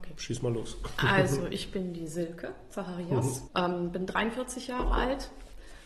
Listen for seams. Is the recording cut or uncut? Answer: cut